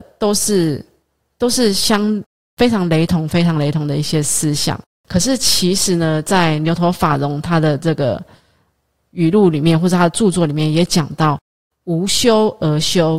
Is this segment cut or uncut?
cut